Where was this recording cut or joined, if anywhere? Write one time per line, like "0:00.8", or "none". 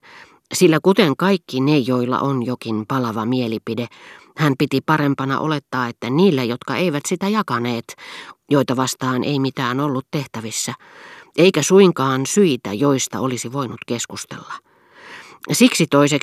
0:08.3